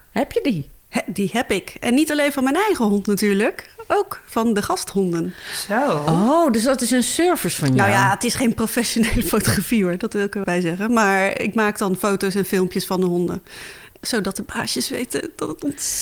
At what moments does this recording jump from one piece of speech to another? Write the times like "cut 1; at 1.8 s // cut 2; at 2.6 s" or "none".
cut 1; at 10.4 s

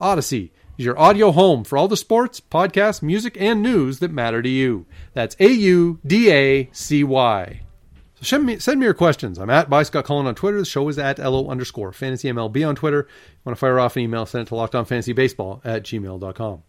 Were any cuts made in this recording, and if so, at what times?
none

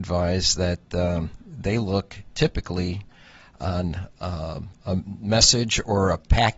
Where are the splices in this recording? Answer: none

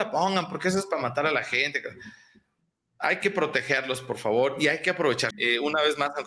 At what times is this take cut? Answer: cut 1; at 5.3 s

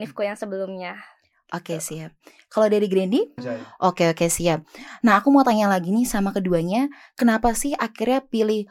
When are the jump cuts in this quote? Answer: cut 1; at 3.4 s

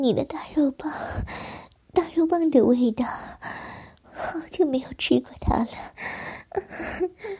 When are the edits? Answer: cut 1; at 4.1 s

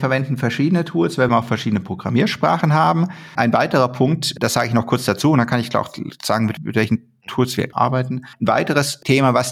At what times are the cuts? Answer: cut 1; at 1.3 s

